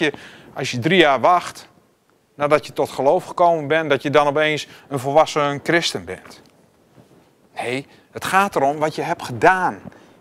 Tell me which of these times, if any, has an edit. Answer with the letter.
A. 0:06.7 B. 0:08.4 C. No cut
C